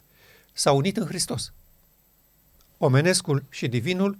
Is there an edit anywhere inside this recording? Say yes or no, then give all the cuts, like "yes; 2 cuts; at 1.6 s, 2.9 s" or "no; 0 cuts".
no; 0 cuts